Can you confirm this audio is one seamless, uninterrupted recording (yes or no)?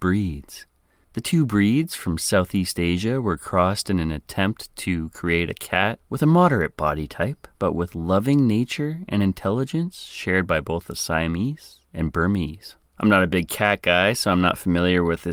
no